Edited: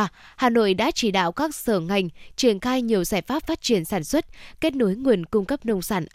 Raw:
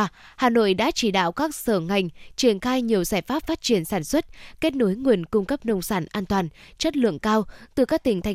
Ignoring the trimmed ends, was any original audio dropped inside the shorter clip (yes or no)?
no